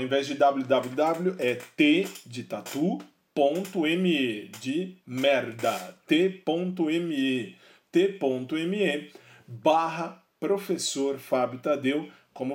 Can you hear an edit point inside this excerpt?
no; 0 cuts

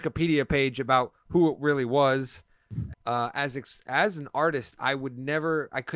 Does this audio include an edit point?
yes; 1 cut; at 2.9 s

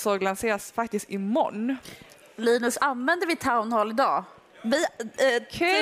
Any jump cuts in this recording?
no; 0 cuts

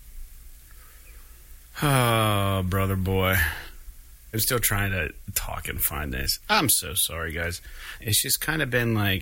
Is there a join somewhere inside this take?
yes; 3 cuts; at 4.3 s, 6.4 s, 8.0 s

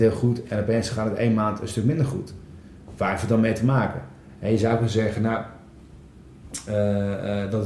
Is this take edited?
no; 0 cuts

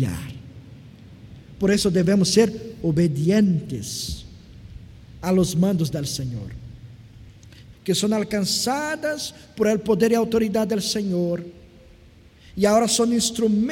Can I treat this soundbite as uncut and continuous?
no; 1 cut; at 7.7 s

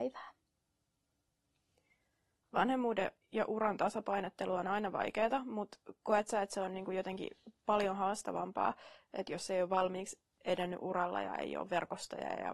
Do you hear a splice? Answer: no; 0 cuts

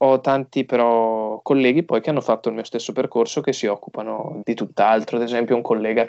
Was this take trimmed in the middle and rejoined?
yes; 1 cut; at 4.4 s

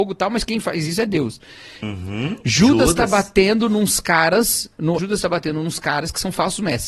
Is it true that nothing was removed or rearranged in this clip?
no; 2 cuts; at 1.8 s, 5.0 s

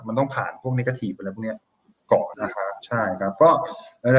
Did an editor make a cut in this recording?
yes; 1 cut; at 2.3 s

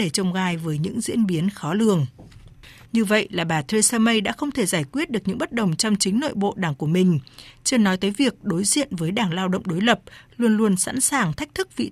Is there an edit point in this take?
yes; 1 cut; at 2.9 s

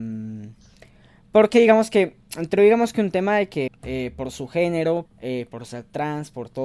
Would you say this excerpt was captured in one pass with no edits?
no; 2 cuts; at 3.7 s, 5.0 s

